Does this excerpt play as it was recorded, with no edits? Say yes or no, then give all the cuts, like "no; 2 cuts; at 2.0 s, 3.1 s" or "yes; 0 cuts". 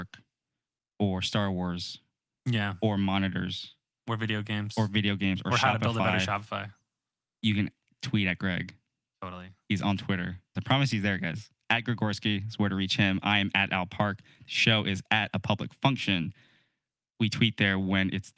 no; 1 cut; at 10.6 s